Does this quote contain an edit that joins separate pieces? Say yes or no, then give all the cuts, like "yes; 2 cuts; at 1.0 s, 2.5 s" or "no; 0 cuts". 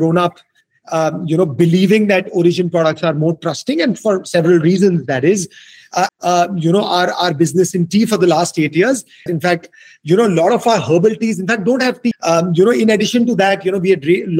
yes; 3 cuts; at 6.1 s, 9.3 s, 12.1 s